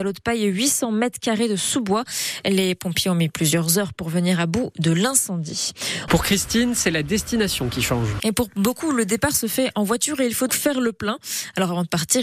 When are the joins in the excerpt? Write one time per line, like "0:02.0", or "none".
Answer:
0:06.1
0:08.2
0:10.5